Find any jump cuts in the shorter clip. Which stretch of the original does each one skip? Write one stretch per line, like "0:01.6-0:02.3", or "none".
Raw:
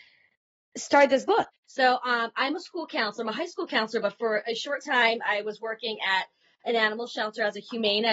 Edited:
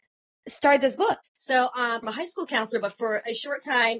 0:02.3-0:03.2